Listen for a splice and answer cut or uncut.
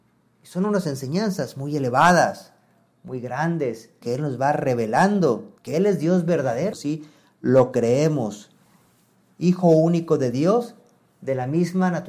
cut